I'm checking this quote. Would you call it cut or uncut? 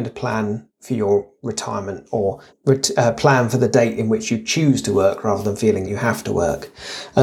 cut